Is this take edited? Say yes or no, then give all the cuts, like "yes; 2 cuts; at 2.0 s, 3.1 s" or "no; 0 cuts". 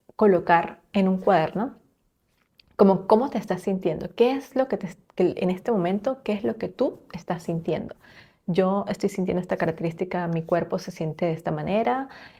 no; 0 cuts